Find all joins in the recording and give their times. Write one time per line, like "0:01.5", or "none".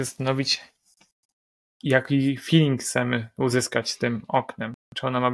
none

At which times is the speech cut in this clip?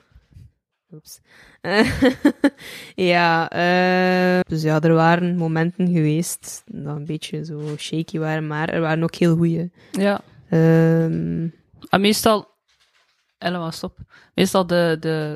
0:04.4

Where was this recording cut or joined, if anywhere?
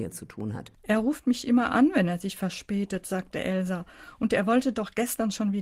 none

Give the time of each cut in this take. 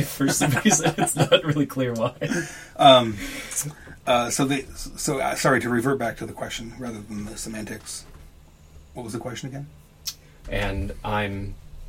0:10.4

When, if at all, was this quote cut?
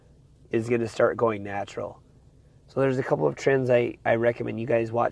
none

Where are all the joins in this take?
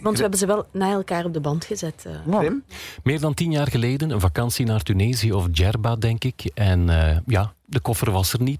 none

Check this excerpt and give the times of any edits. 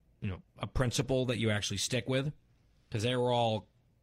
none

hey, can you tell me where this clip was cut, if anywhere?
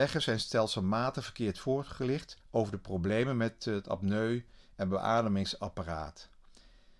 0:02.4

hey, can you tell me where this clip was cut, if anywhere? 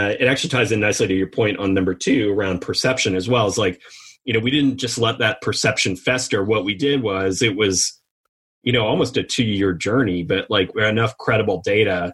0:10.7

